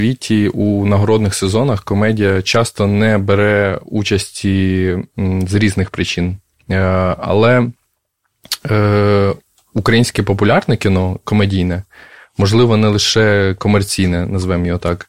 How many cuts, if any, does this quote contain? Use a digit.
0